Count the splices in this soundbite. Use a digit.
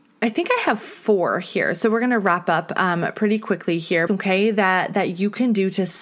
1